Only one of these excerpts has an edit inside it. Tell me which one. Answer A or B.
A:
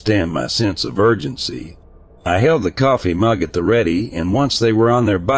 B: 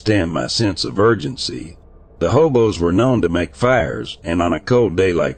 B